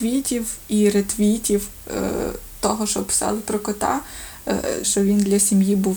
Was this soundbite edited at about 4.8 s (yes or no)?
yes